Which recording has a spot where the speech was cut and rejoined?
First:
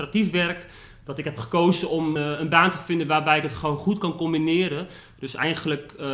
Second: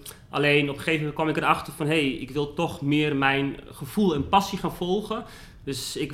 first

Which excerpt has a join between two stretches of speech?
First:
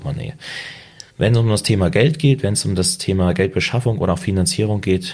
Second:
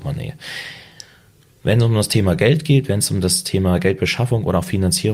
first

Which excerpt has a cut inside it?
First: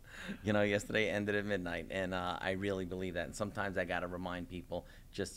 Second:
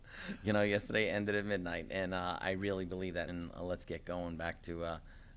second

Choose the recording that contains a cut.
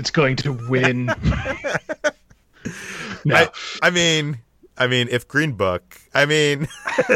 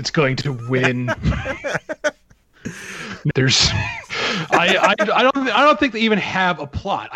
second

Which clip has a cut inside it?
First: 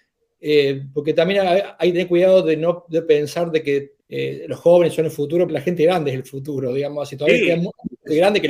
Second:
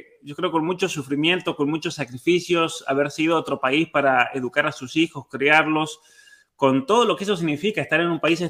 first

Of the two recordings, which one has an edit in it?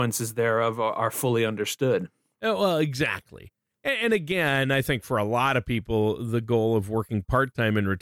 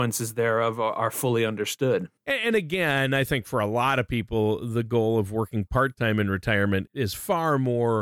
second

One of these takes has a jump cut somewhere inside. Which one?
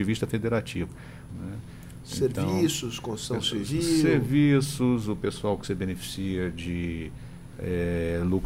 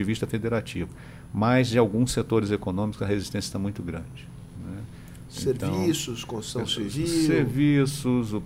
first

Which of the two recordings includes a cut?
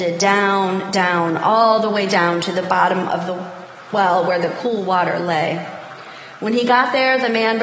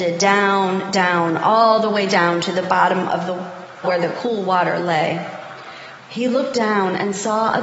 second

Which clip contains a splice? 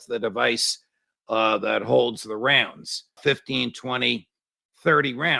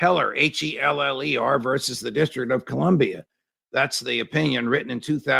first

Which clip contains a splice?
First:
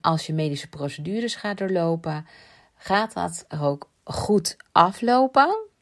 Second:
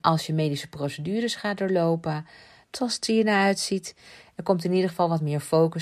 second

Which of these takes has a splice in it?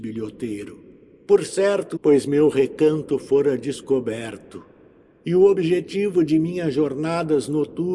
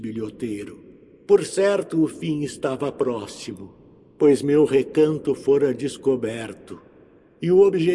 first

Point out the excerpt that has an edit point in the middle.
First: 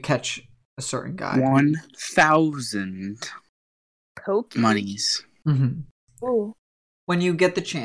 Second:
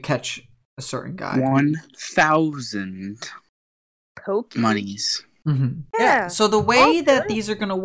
second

